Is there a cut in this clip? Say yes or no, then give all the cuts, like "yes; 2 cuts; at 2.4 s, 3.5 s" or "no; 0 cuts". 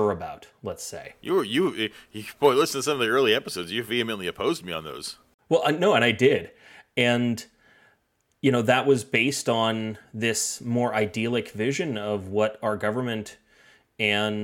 no; 0 cuts